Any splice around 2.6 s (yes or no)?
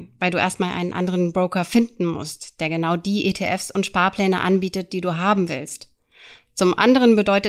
no